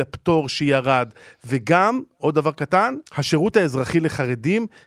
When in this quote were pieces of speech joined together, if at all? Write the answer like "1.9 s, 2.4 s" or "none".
3.1 s